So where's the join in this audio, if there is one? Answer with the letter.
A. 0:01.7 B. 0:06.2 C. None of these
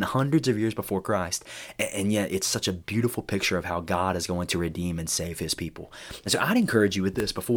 C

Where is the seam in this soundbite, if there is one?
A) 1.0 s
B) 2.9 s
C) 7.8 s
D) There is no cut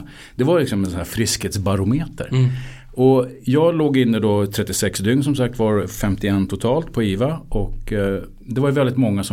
D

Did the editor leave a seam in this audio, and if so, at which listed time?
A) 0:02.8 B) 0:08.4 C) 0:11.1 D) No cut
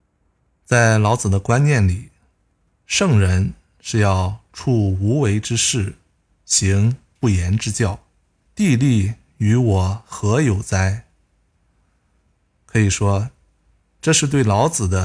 B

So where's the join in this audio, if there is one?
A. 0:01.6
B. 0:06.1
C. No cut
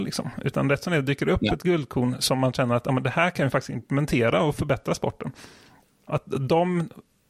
B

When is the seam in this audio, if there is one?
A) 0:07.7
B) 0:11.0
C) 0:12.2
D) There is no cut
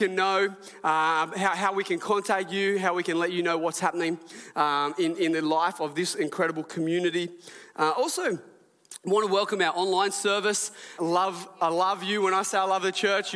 B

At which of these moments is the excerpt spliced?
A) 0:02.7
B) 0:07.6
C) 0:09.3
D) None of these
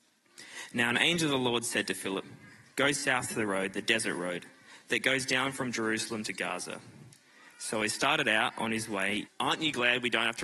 C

